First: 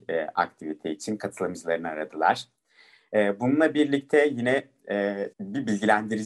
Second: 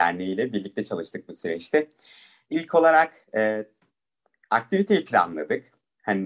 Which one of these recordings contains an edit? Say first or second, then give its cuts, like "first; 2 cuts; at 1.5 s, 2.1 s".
first; 1 cut; at 5.3 s